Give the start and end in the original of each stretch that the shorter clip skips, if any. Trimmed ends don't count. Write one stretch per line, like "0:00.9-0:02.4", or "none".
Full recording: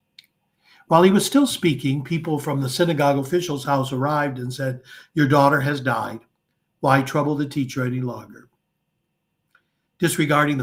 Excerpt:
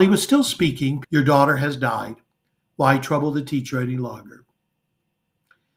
0:02.1-0:05.1